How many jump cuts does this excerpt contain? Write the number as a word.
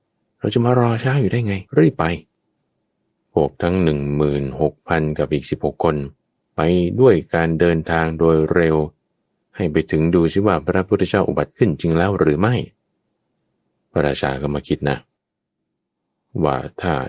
one